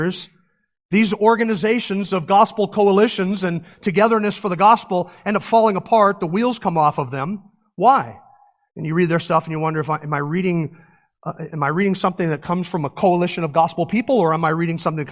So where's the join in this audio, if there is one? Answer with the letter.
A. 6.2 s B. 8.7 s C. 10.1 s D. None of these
B